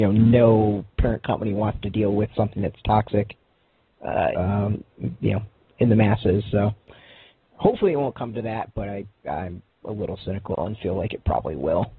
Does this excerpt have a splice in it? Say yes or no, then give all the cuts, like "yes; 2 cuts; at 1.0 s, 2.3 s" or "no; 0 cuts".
yes; 1 cut; at 4.3 s